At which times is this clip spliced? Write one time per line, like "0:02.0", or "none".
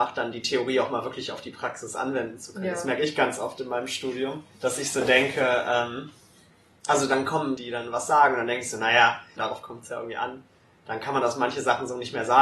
0:04.5
0:07.6
0:09.4